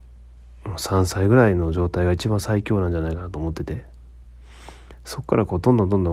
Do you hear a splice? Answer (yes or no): no